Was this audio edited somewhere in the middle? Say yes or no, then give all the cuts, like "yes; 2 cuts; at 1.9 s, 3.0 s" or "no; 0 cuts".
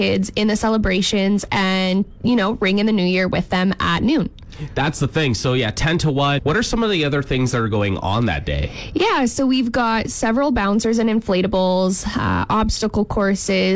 yes; 1 cut; at 6.4 s